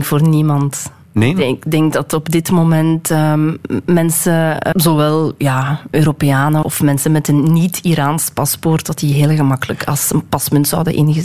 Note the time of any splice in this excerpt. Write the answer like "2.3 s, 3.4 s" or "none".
4.7 s, 6.6 s